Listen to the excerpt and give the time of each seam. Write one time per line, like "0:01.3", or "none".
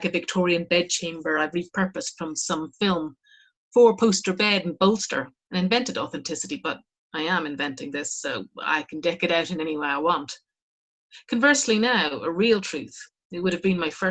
0:05.4